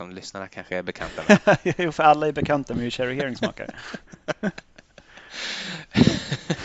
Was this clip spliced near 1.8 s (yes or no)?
no